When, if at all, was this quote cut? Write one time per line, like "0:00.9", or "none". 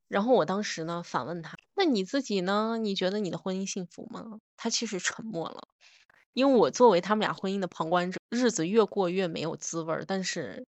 0:08.2

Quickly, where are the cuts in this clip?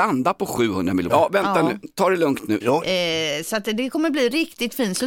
0:01.1
0:02.6

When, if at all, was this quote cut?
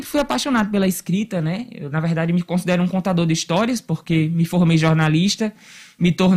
none

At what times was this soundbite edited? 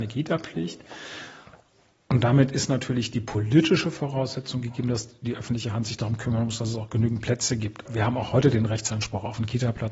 0:07.9

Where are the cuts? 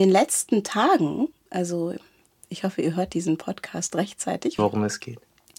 0:04.6

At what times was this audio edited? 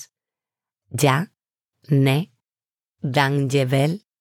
none

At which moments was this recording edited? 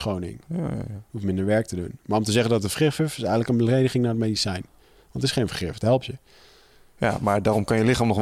none

